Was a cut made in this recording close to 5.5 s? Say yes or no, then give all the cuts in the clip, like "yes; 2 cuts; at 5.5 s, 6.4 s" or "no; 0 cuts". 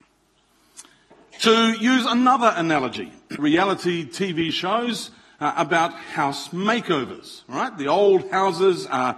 no; 1 cut; at 3.4 s